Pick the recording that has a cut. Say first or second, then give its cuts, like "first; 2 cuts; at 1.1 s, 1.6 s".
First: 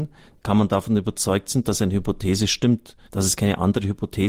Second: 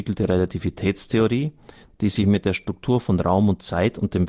first; 1 cut; at 3.1 s